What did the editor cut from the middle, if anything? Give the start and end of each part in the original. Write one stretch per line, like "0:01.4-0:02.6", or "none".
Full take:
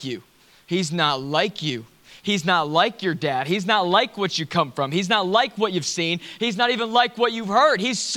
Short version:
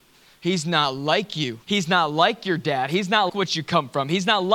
0:01.9-0:02.2
0:03.9-0:04.1